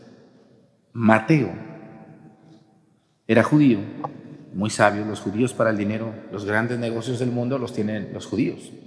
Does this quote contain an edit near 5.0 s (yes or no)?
no